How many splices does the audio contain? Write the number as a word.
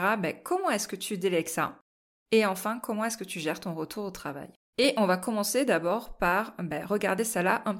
one